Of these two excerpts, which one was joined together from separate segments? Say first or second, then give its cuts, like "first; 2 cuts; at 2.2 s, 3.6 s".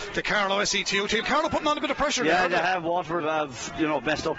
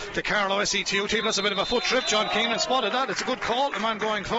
first; 2 cuts; at 1.2 s, 3.2 s